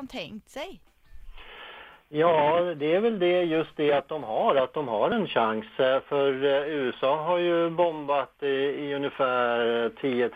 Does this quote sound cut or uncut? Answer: uncut